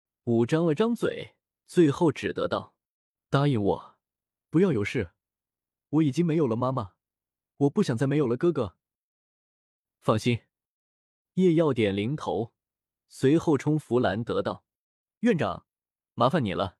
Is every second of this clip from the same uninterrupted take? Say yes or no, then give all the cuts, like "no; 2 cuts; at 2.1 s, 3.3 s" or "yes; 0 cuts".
yes; 0 cuts